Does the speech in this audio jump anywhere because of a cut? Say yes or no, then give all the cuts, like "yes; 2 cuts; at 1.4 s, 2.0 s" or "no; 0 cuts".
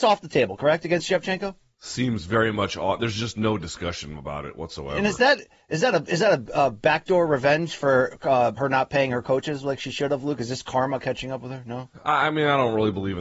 yes; 1 cut; at 8.6 s